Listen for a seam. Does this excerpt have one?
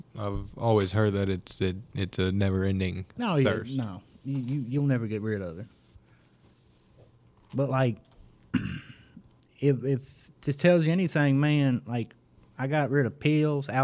no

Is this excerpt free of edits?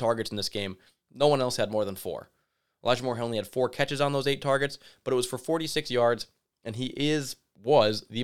yes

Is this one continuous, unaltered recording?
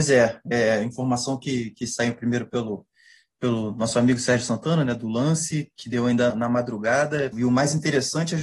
no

